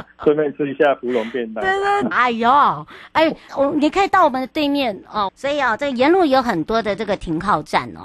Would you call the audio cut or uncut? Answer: cut